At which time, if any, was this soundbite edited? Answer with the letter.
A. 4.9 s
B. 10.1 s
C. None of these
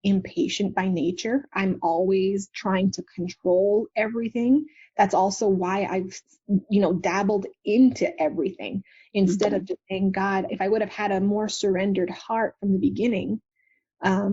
C